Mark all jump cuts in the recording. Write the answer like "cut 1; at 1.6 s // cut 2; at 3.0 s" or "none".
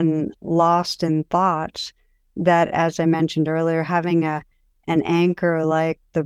none